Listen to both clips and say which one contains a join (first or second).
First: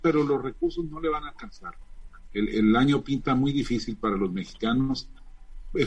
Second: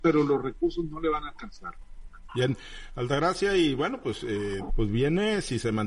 second